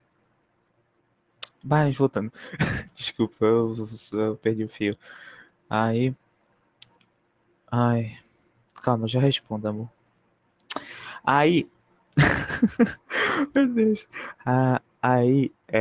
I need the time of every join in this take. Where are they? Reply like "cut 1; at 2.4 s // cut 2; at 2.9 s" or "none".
none